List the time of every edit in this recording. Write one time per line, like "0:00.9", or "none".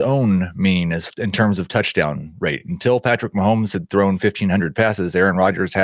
none